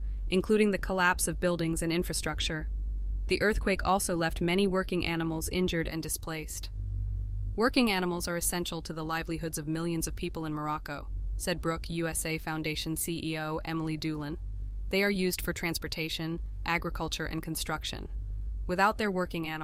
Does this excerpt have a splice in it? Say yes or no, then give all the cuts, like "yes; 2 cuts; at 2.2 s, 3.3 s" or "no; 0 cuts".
no; 0 cuts